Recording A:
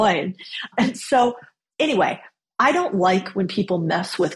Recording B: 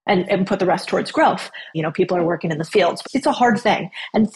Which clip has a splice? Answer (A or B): B